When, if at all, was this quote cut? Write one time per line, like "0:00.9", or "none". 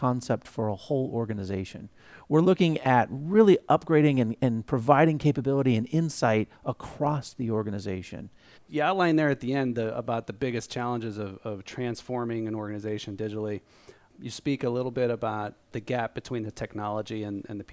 0:08.5